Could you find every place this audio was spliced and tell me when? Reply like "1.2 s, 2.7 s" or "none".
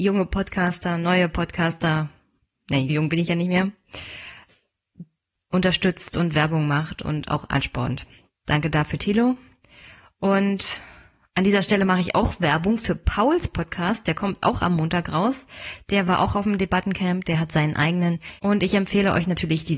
2.9 s, 18.4 s